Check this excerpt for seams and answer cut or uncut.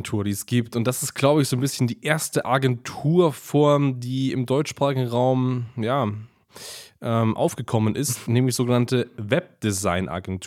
uncut